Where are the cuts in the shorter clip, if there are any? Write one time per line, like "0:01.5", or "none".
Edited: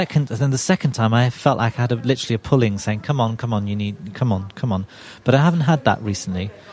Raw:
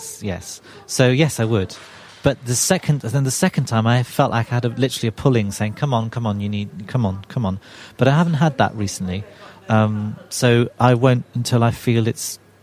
none